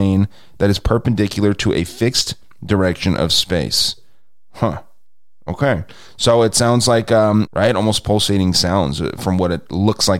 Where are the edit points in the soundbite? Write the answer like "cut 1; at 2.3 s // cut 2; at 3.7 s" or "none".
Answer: cut 1; at 7.5 s

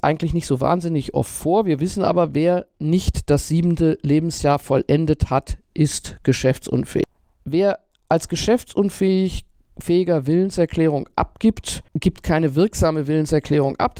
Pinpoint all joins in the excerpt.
cut 1; at 11.9 s

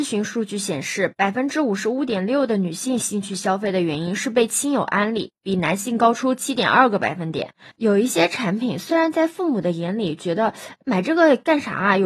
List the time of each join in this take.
cut 1; at 7.7 s

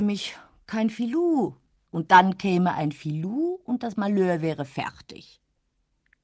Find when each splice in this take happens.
cut 1; at 1.8 s

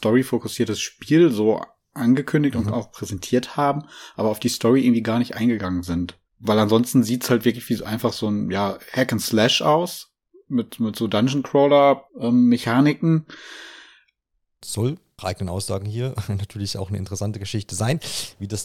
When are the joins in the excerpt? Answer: cut 1; at 6.3 s // cut 2; at 12.1 s // cut 3; at 14.6 s

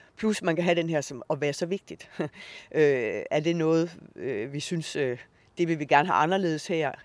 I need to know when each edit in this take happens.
none

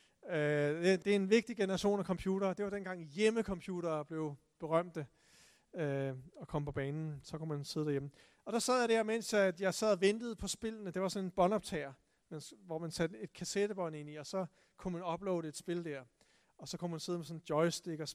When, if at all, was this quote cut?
cut 1; at 1.0 s

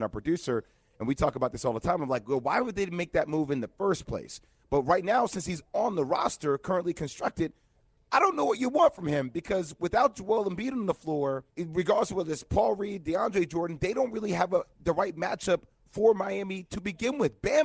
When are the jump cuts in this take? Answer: cut 1; at 11.5 s

